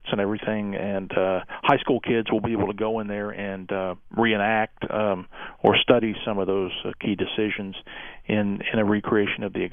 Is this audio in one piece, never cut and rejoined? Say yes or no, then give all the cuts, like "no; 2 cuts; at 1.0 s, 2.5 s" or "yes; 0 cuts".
yes; 0 cuts